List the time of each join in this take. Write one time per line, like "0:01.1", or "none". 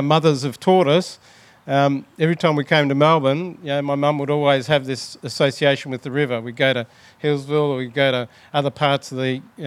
none